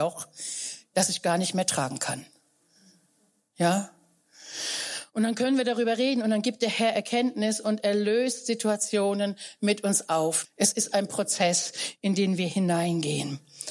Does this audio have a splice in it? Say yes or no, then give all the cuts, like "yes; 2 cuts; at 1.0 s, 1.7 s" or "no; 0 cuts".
yes; 1 cut; at 10.4 s